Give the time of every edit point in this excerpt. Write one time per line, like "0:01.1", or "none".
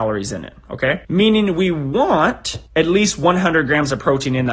0:01.0
0:02.7